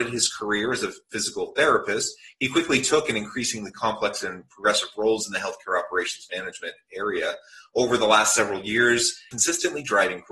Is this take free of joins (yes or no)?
no